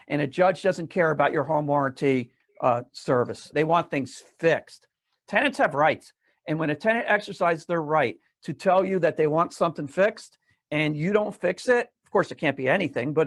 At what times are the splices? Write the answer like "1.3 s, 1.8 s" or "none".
3.5 s